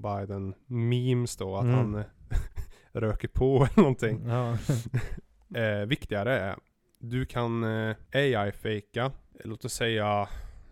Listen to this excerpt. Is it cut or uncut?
uncut